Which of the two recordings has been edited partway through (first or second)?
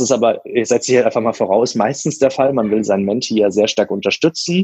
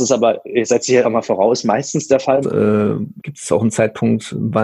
second